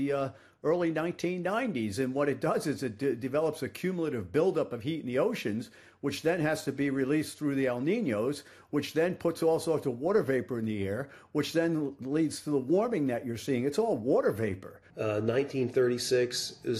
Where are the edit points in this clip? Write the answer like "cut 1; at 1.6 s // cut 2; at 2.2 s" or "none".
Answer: cut 1; at 14.9 s